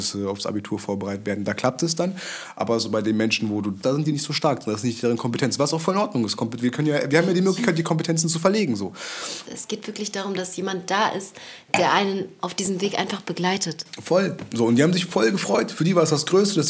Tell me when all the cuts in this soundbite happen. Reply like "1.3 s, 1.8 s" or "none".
3.8 s, 9.5 s